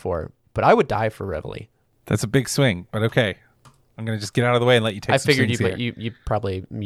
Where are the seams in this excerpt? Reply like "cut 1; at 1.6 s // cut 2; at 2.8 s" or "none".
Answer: none